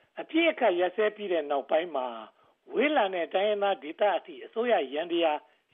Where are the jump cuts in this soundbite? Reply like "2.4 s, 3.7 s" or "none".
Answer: none